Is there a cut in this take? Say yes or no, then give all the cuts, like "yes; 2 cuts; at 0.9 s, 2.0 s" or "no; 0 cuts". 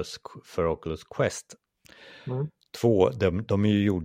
no; 0 cuts